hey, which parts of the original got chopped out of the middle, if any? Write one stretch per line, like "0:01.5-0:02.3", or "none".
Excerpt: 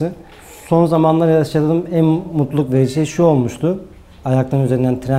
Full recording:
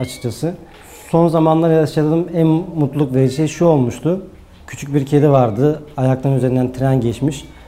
0:04.6-0:05.9